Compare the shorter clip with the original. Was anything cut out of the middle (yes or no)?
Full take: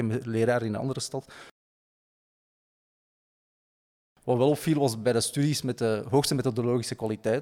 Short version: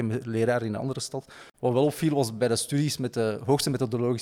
yes